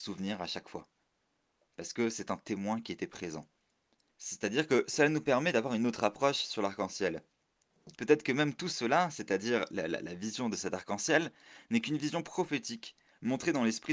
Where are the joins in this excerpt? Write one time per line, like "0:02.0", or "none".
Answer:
0:04.1
0:07.9